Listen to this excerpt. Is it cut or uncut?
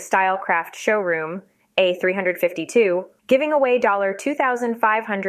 cut